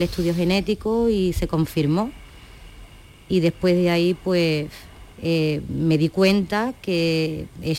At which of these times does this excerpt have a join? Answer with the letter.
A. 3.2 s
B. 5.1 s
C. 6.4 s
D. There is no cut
B